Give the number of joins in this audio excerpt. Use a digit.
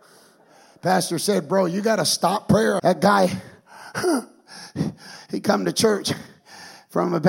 2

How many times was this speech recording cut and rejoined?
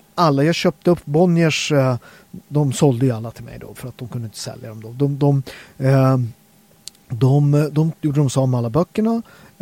1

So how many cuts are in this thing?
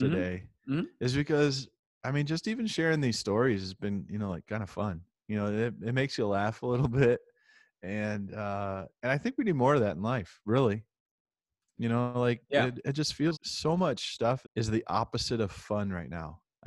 2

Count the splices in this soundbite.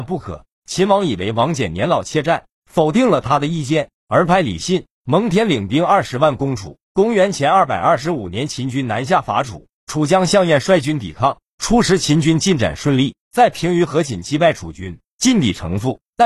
0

